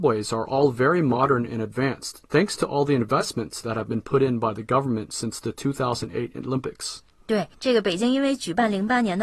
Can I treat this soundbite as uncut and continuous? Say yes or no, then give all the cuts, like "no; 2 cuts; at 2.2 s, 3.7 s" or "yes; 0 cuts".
yes; 0 cuts